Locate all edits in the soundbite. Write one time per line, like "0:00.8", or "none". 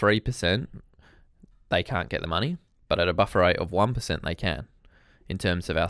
none